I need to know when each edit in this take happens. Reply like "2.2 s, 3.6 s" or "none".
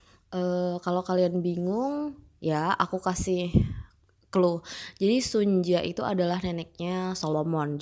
none